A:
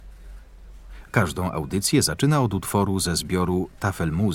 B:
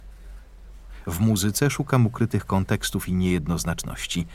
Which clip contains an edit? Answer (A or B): A